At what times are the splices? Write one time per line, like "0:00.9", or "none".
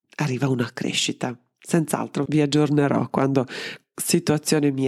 0:02.3